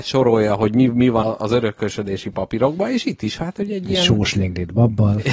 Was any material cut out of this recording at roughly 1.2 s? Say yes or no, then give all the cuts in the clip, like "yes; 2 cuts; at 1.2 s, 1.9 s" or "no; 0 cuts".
yes; 1 cut; at 1.2 s